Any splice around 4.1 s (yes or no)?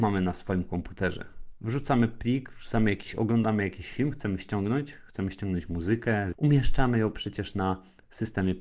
no